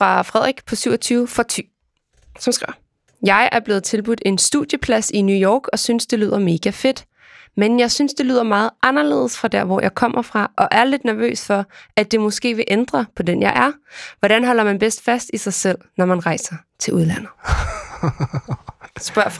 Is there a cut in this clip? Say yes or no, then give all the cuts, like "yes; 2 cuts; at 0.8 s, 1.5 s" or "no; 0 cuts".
no; 0 cuts